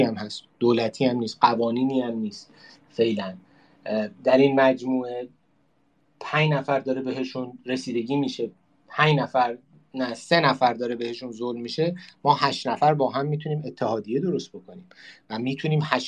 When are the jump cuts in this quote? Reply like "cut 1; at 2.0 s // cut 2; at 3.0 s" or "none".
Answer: none